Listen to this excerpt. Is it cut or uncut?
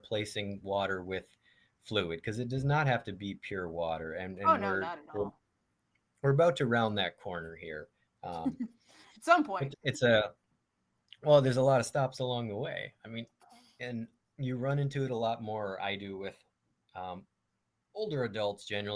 cut